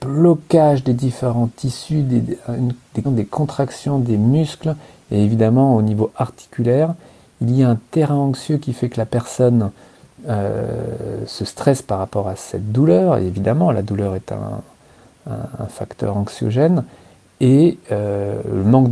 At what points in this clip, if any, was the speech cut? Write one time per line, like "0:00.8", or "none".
0:03.0

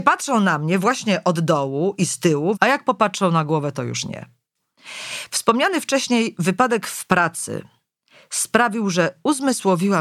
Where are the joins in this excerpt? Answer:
0:02.5

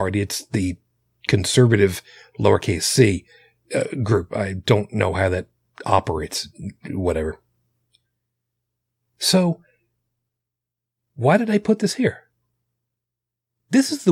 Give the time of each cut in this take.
none

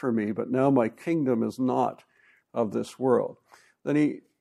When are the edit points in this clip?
none

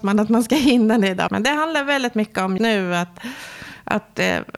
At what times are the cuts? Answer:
0:01.3
0:02.6

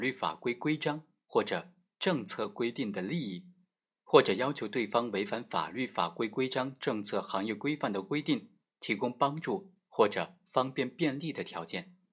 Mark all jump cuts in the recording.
none

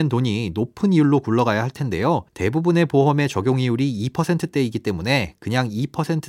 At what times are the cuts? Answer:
0:02.3

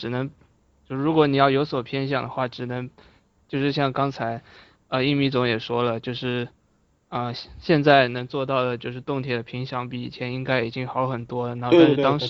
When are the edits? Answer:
0:03.4

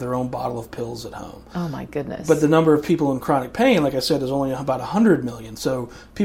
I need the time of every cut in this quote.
none

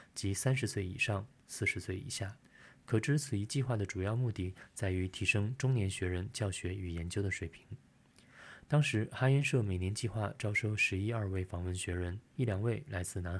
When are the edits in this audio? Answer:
0:12.3

